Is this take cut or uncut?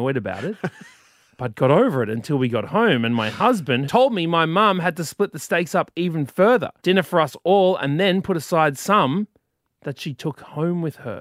cut